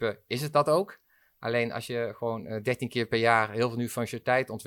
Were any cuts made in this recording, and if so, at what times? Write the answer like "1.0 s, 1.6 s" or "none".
none